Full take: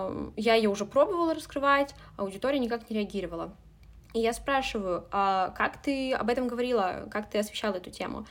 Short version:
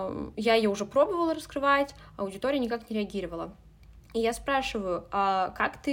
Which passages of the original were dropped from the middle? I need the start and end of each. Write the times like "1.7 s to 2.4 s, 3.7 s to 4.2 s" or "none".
none

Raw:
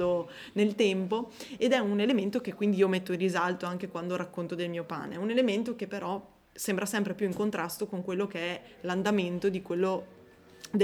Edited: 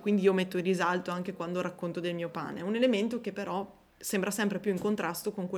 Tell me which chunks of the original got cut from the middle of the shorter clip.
none

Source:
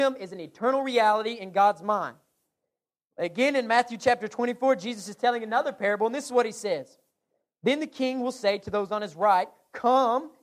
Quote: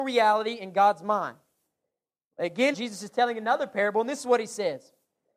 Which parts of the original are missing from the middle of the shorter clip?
3.5 s to 4.8 s

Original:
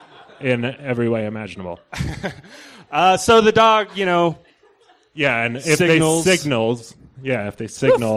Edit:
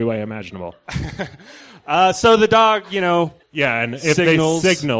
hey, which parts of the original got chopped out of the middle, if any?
4.5 s to 5.0 s

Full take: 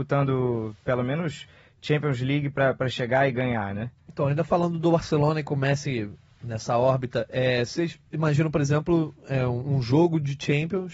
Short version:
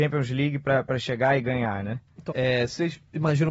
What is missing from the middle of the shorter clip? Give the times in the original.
4.2 s to 7.3 s

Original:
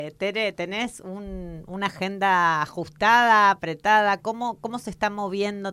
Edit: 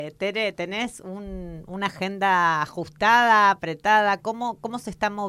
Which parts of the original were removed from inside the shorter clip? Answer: none

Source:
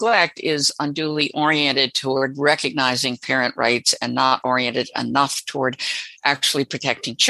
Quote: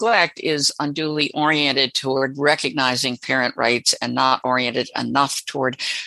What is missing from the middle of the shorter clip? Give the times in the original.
none

